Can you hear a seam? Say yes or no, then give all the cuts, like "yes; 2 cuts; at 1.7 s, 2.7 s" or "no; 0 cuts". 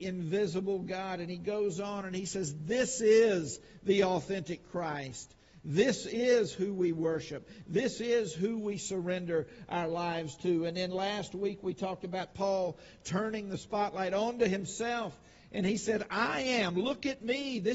no; 0 cuts